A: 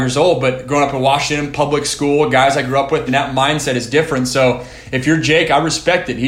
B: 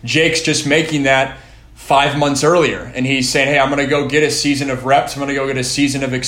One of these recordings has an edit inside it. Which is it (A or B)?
A